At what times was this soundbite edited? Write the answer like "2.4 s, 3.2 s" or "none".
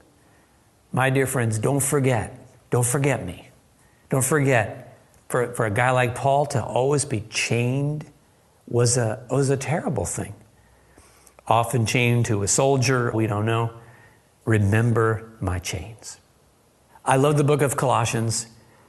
13.1 s, 16.9 s